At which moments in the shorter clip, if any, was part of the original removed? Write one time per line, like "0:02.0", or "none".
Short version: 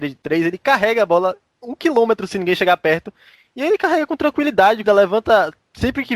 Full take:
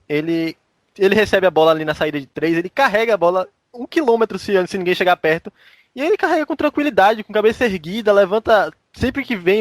0:02.3
0:04.8